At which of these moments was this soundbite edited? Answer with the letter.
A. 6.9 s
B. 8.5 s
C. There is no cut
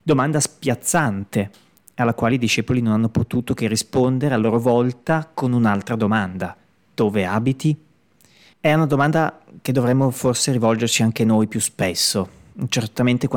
B